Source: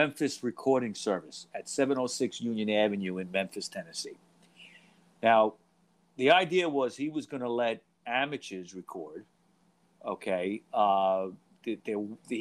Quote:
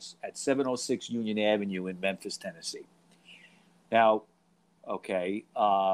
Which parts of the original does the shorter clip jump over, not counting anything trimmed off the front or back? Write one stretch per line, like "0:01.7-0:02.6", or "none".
0:06.1-0:09.9